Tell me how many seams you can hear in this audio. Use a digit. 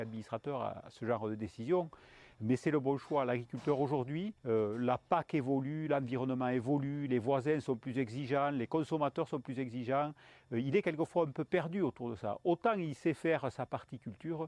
1